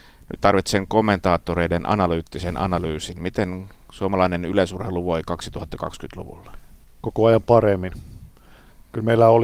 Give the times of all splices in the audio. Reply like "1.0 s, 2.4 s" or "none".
none

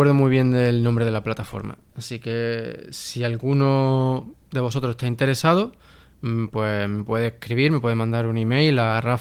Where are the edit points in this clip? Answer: none

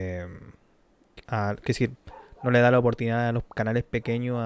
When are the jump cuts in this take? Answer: 1.3 s

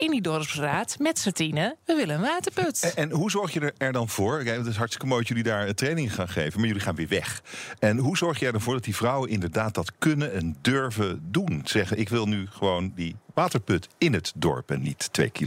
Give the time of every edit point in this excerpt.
none

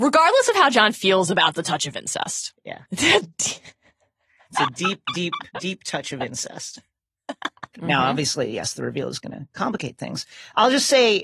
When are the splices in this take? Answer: 2.9 s, 5.5 s, 7.7 s

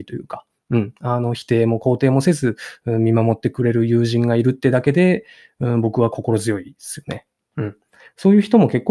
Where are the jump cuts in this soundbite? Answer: none

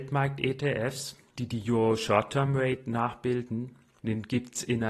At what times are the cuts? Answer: 4.0 s

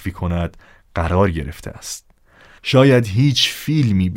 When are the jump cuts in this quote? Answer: 2.6 s

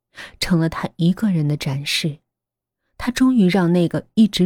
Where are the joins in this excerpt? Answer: none

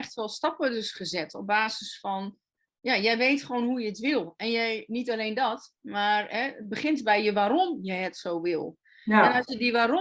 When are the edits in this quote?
none

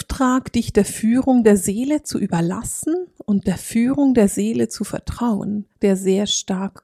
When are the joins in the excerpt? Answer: 5.8 s

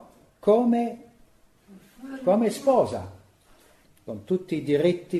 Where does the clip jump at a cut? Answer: 3.8 s

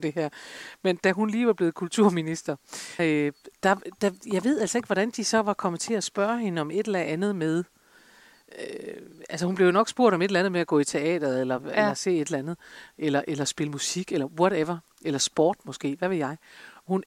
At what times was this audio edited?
3.0 s

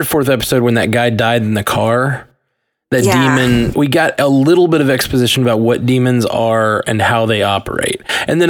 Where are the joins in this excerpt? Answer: 3.7 s

